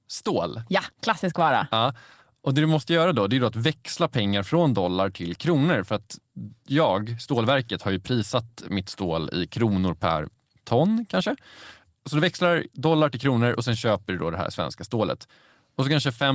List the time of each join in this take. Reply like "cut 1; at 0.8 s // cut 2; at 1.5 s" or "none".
none